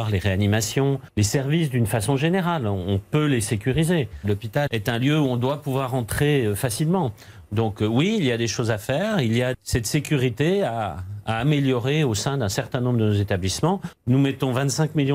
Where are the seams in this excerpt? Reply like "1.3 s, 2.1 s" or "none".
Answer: 4.2 s